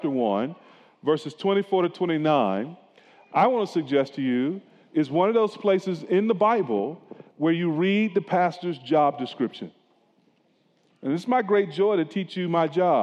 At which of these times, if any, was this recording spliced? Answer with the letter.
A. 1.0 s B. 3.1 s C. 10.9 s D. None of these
C